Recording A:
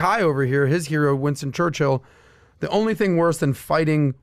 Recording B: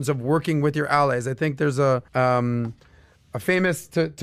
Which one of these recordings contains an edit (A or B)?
B